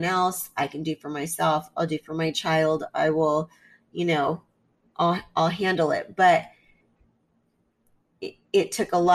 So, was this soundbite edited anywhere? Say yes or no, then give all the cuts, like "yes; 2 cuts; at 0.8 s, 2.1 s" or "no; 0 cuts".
no; 0 cuts